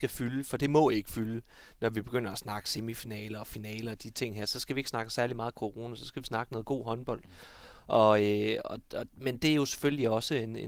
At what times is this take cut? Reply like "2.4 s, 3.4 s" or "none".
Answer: none